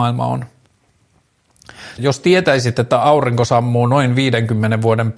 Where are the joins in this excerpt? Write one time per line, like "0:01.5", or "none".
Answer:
0:02.0